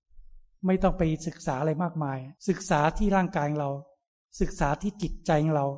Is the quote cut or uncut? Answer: cut